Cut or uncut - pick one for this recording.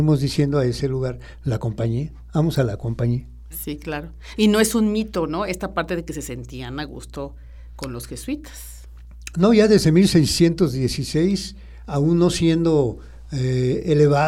uncut